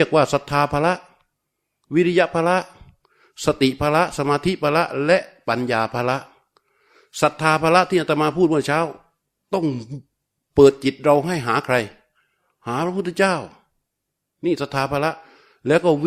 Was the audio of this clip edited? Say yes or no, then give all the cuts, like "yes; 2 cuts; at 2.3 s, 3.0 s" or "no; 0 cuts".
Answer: no; 0 cuts